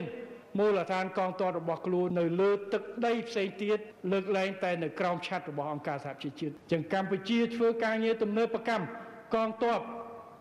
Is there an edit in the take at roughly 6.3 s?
no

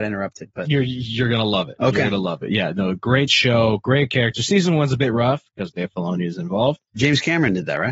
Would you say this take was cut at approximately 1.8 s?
no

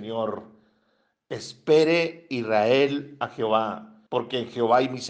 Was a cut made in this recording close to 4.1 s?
yes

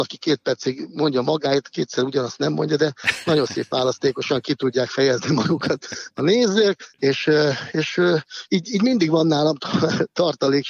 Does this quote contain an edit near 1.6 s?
no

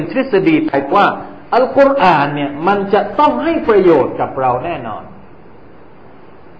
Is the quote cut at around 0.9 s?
yes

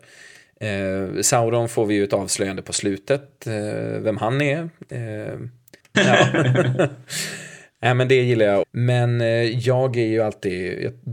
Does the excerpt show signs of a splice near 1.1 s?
no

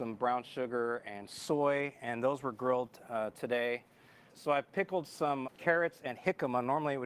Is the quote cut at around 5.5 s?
yes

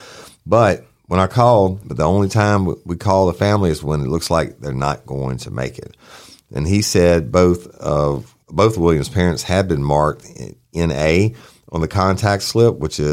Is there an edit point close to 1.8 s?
yes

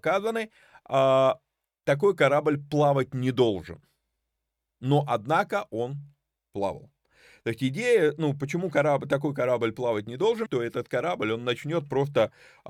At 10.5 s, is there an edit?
yes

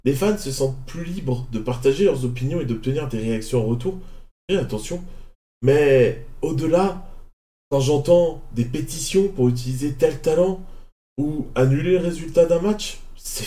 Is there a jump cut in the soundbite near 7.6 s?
no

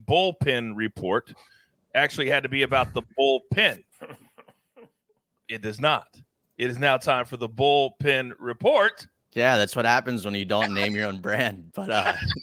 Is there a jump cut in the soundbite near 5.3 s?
no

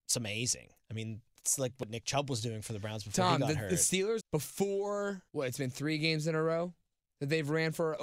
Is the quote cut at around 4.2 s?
yes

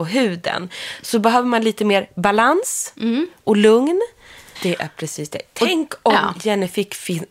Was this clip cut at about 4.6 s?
yes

